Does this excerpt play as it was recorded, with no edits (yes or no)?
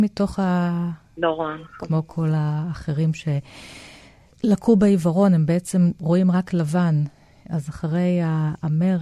no